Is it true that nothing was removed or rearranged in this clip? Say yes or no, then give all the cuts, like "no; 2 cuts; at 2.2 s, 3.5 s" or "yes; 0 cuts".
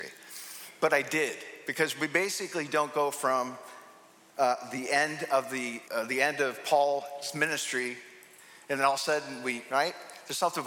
no; 2 cuts; at 5.8 s, 9.7 s